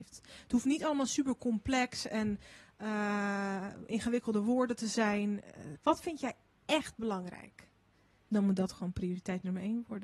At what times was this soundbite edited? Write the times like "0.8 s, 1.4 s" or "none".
5.7 s, 8.3 s